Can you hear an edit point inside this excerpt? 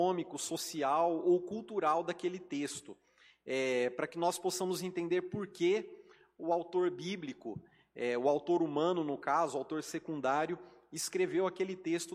no; 0 cuts

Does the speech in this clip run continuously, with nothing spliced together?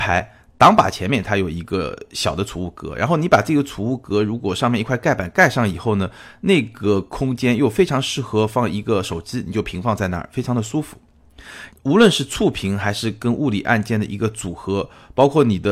no; 1 cut; at 11.7 s

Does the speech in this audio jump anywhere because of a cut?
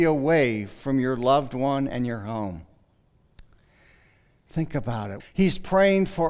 yes; 1 cut; at 5.2 s

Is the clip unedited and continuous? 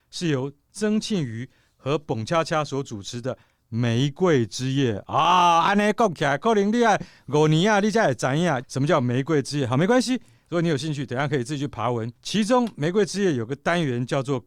no; 2 cuts; at 8.6 s, 12.2 s

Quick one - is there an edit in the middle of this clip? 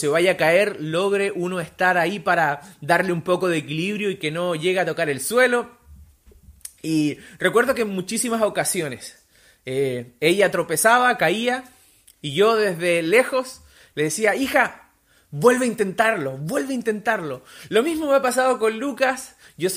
no; 0 cuts

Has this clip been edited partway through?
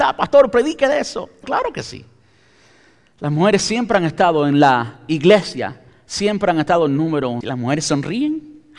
yes; 2 cuts; at 1.4 s, 7.4 s

